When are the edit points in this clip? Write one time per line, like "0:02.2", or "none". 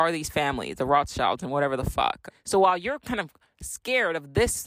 0:02.3